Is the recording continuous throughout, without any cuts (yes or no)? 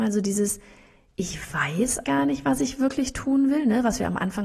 no